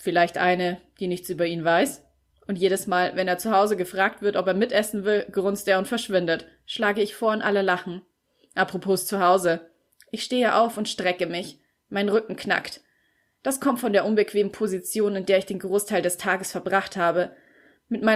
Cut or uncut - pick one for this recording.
uncut